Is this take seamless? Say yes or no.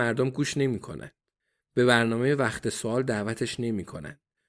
yes